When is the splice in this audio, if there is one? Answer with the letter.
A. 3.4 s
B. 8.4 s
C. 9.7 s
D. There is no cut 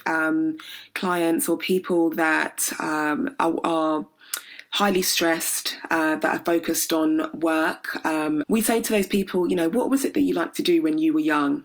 B